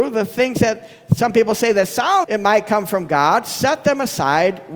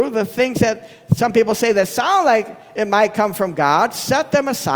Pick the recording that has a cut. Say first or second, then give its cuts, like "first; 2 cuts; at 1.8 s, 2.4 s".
first; 1 cut; at 2.2 s